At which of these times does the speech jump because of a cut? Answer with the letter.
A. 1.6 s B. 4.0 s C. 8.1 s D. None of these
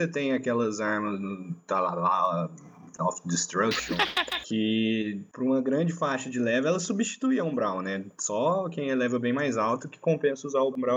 D